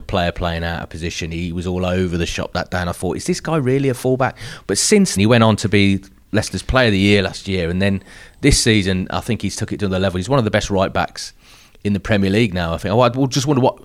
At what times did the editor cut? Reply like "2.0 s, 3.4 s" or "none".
5.2 s